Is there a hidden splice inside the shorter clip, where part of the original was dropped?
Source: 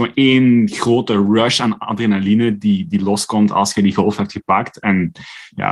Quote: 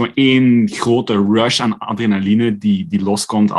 no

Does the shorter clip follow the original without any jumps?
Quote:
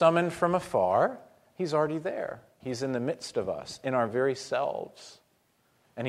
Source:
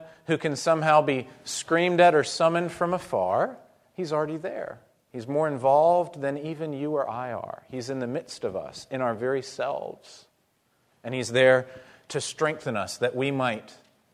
no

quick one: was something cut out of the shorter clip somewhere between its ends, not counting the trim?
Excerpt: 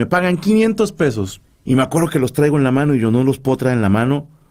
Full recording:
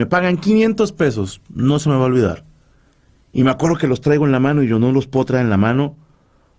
yes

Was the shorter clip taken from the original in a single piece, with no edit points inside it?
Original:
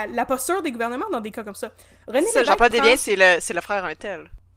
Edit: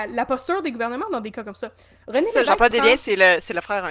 yes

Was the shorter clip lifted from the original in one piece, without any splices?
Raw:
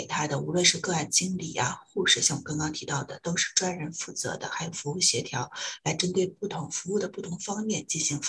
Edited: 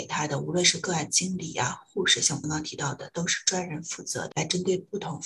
no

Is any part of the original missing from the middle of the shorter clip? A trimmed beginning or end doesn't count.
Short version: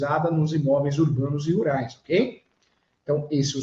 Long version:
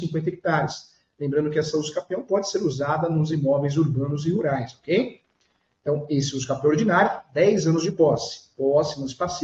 no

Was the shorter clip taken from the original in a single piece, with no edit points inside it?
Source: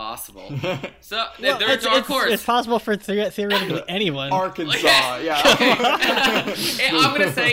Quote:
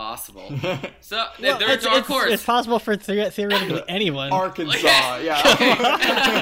yes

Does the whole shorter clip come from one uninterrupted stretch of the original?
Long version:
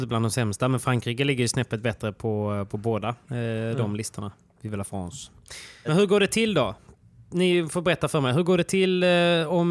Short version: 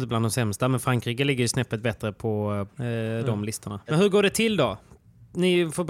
no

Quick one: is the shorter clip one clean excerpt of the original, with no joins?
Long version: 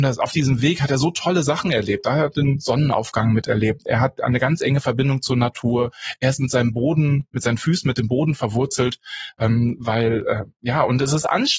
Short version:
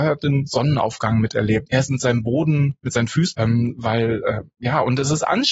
no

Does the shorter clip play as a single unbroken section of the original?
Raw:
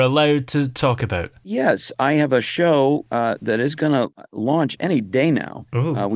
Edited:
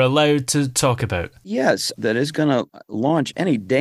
no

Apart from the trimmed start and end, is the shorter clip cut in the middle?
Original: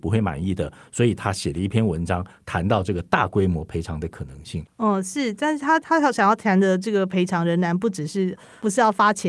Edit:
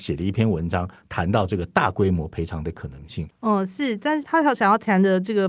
yes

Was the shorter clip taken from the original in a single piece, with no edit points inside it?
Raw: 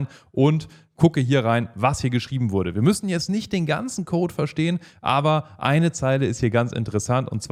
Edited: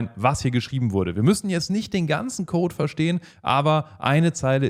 yes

